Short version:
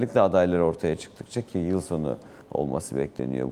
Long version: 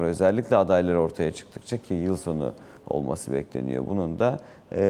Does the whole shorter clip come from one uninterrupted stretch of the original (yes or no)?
yes